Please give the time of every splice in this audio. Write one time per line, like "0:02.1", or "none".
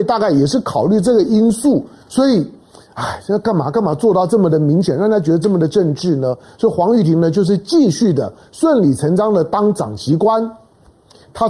none